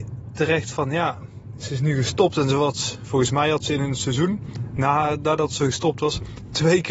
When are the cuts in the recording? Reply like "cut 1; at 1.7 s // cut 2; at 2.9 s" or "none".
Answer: none